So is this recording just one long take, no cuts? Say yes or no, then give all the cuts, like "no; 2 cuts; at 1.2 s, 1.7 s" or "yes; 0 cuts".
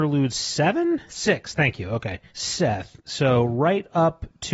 no; 2 cuts; at 1.1 s, 2.3 s